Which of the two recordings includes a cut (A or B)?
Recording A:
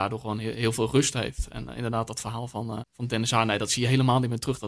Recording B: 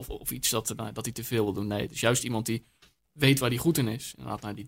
A